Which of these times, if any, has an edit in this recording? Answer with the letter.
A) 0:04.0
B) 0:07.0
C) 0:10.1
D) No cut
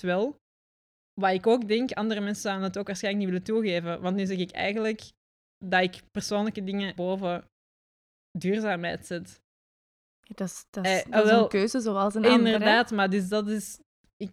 B